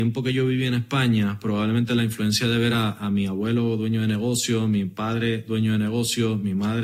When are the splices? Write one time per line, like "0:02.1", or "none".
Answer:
none